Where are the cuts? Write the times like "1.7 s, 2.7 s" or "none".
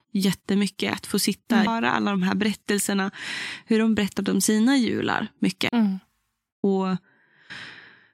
1.7 s, 5.7 s